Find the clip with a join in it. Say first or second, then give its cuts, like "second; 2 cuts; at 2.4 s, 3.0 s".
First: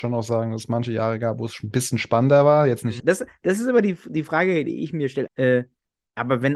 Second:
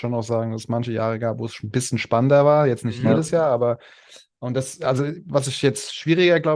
first; 2 cuts; at 3.0 s, 5.3 s